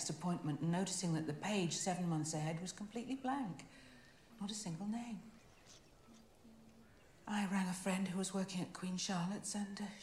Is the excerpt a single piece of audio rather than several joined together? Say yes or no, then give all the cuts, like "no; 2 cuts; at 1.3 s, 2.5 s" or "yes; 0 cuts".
yes; 0 cuts